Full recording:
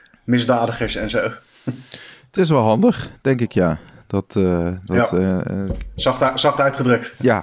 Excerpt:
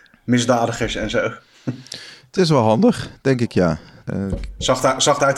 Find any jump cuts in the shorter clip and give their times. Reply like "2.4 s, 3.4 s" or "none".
4.1 s

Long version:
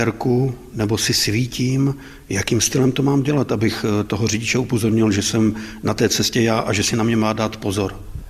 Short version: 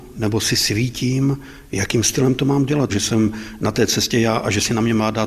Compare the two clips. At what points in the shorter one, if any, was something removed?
2.9 s

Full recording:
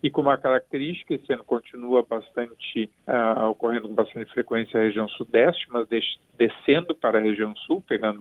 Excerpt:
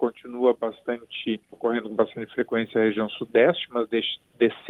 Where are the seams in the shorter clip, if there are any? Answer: 1.5 s

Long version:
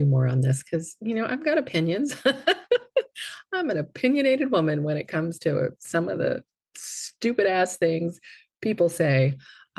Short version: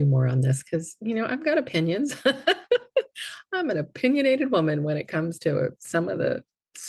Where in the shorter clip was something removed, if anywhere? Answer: none

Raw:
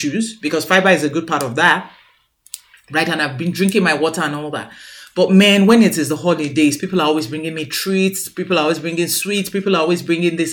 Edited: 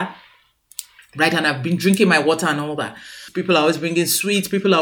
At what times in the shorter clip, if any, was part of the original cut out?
3.3 s

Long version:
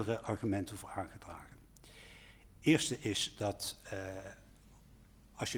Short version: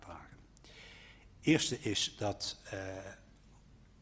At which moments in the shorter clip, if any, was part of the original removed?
none

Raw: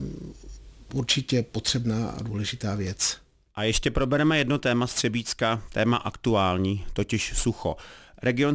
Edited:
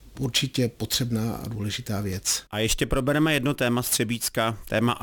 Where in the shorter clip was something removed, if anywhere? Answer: 2.5 s

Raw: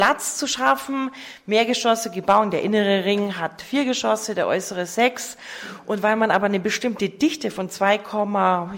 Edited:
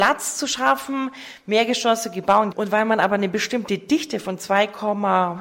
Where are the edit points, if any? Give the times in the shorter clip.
2.5 s

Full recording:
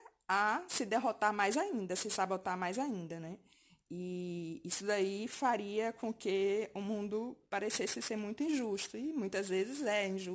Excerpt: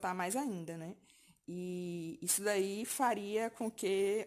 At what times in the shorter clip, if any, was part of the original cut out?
none

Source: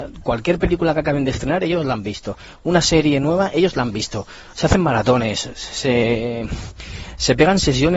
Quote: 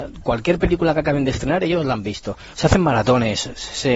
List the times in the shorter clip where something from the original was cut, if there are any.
2.5 s

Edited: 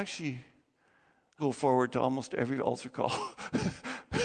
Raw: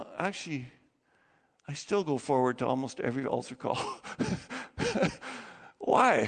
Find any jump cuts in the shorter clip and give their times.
1.4 s

